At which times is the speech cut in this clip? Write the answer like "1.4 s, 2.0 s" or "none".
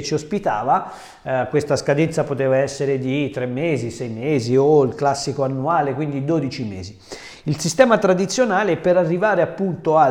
none